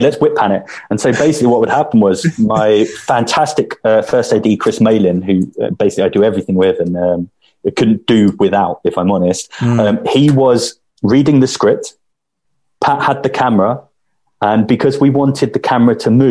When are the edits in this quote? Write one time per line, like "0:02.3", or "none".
none